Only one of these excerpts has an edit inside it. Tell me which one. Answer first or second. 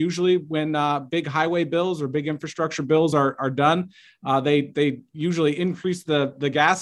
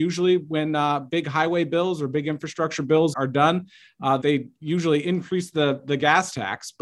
second